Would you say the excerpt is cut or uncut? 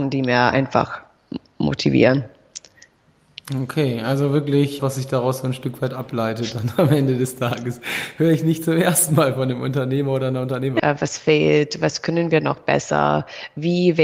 cut